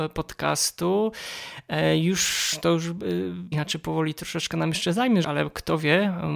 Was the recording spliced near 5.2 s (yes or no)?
yes